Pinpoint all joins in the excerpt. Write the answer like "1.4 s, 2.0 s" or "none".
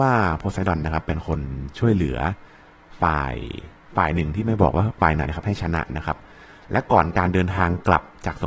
5.2 s